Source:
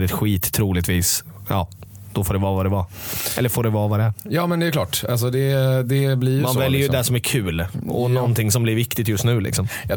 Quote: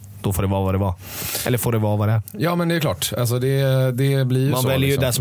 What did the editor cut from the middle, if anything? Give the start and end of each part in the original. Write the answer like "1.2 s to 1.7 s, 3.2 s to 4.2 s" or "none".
none